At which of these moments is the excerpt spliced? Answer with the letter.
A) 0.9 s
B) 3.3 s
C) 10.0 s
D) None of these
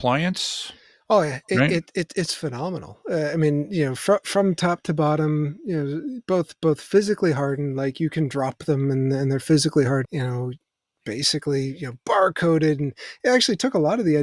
C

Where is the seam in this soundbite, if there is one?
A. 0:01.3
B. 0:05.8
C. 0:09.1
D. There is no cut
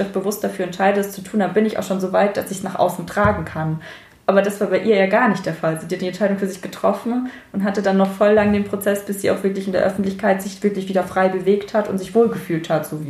D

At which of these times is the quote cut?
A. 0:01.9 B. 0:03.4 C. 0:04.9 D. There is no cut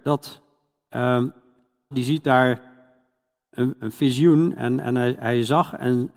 A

